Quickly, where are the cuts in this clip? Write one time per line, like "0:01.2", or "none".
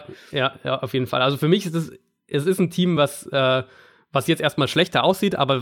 none